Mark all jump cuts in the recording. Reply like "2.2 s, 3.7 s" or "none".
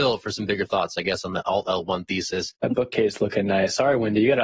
2.6 s